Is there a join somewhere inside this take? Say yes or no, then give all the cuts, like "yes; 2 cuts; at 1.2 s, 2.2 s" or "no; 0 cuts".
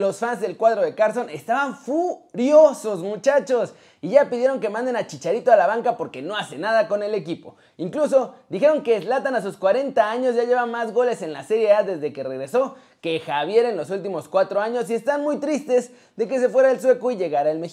no; 0 cuts